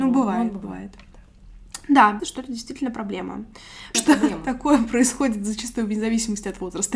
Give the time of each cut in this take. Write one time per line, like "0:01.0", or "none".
0:02.2
0:03.9